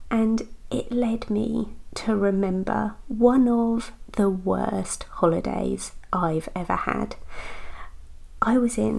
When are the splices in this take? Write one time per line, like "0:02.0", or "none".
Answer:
none